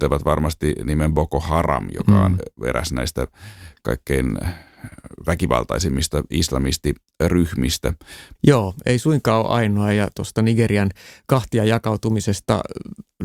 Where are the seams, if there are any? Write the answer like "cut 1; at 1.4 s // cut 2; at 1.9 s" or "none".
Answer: cut 1; at 8.3 s